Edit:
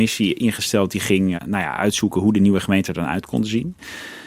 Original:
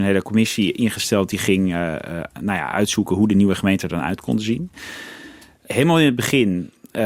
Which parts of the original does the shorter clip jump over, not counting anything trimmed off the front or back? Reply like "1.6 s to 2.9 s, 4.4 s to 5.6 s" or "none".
1.7 s to 2.3 s